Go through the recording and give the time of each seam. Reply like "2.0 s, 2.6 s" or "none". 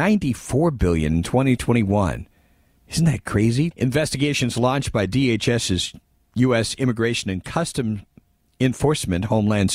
3.7 s